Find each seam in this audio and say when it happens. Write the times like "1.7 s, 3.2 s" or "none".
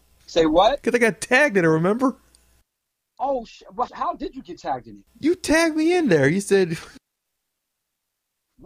3.9 s